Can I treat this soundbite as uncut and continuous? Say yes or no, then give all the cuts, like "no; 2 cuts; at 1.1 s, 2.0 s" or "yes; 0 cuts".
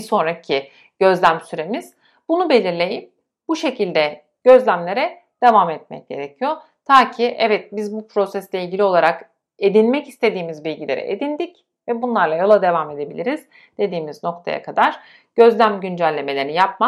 yes; 0 cuts